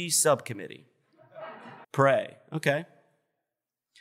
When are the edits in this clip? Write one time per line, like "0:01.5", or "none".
0:01.8